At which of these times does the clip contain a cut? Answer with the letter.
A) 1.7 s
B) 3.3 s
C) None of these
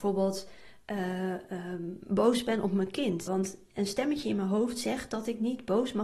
B